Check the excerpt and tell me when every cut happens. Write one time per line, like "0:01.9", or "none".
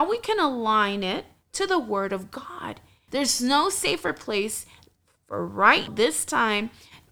0:03.1
0:05.9